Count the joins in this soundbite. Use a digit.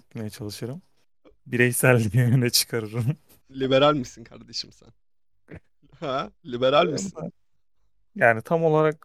1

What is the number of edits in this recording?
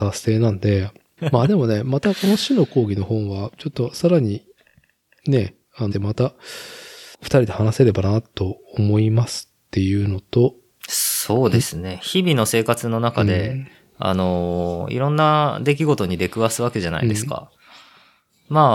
3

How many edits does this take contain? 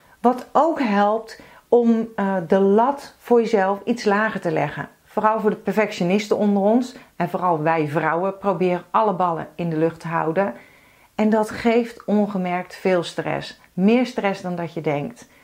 0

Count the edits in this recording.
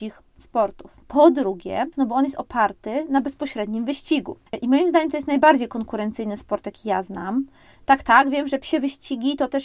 1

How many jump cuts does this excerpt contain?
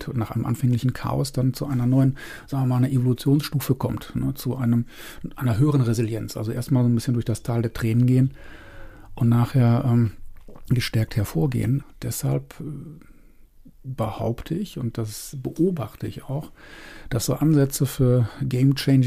1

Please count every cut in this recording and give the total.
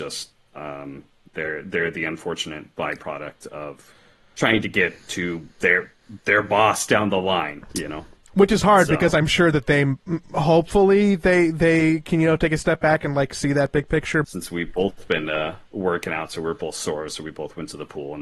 2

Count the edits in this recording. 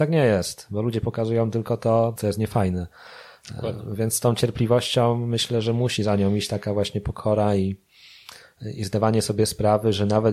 1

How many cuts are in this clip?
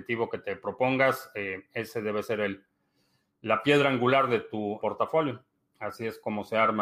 1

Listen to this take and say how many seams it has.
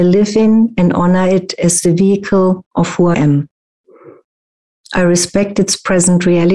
1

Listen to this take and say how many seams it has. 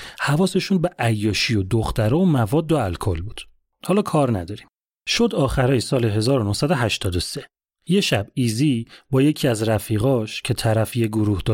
0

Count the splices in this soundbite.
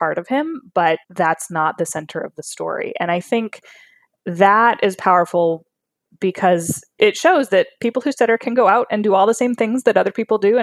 1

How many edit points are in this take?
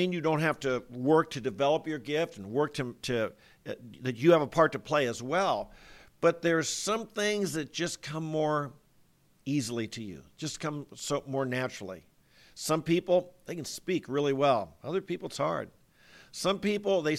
0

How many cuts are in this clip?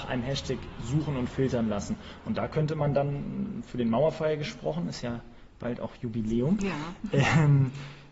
0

